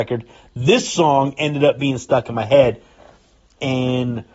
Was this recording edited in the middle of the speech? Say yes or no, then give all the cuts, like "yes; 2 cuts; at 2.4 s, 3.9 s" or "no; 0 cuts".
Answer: no; 0 cuts